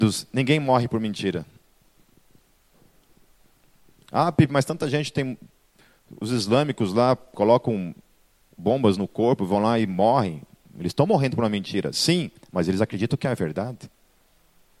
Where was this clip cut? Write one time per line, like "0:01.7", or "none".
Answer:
none